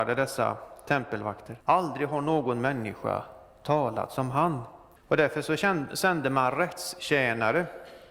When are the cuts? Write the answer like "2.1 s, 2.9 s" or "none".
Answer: 1.6 s, 5.0 s